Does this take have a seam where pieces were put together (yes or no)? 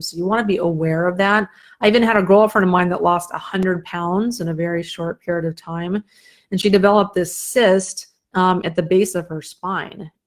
no